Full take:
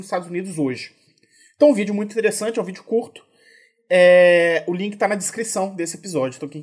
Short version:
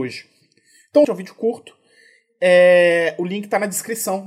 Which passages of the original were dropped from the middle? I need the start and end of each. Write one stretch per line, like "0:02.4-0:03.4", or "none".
0:01.7-0:02.5